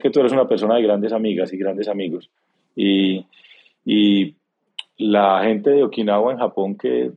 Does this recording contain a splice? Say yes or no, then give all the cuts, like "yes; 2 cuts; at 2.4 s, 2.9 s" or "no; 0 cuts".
no; 0 cuts